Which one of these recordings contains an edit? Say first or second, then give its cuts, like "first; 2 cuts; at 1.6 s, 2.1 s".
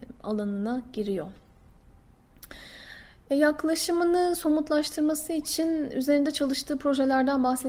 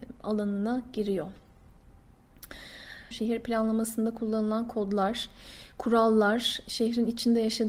second; 1 cut; at 3.1 s